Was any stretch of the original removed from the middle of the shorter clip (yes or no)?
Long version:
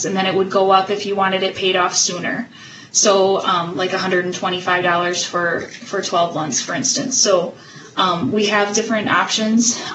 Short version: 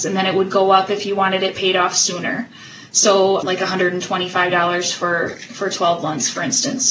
yes